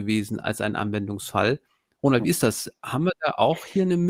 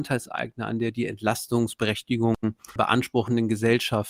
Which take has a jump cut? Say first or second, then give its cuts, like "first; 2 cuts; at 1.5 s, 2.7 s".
second; 1 cut; at 2.8 s